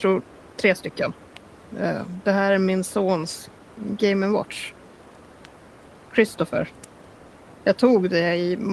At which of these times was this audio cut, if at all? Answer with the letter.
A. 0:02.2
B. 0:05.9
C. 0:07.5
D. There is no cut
C